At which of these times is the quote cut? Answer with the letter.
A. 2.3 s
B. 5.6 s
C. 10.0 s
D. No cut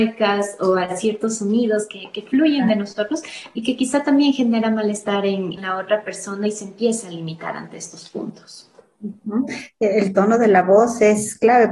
B